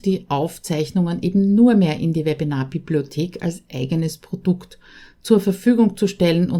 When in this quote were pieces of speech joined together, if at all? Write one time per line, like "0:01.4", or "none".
none